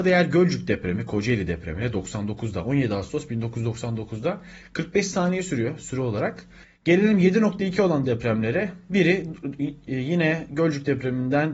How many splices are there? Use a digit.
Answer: 1